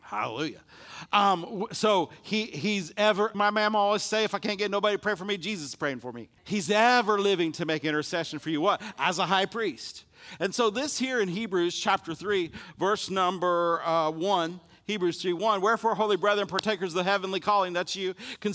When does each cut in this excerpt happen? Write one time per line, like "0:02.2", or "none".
0:03.3
0:06.4

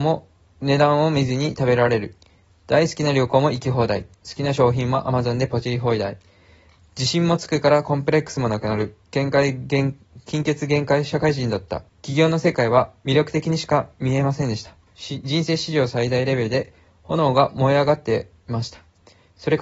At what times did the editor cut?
0:11.9

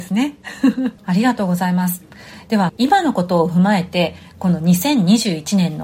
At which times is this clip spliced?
0:01.0
0:02.7

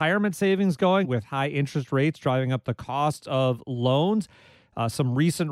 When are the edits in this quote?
0:01.0

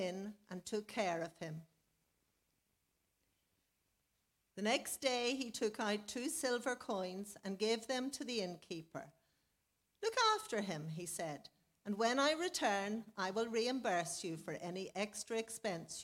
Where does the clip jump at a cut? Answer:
none

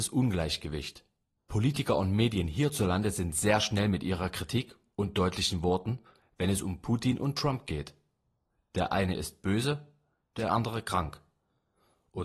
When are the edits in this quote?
0:01.4

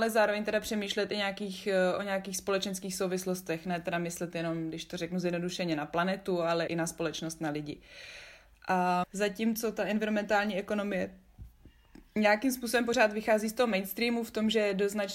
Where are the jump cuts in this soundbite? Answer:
0:06.7
0:09.0

